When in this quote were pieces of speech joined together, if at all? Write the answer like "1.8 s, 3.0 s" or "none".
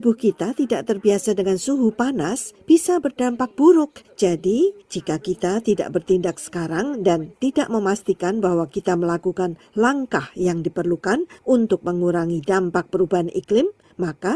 none